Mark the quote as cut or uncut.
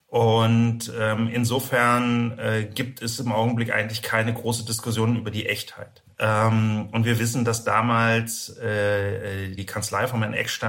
cut